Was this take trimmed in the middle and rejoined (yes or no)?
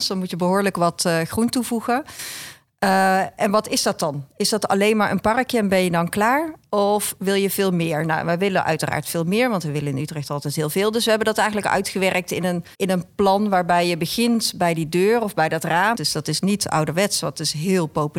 yes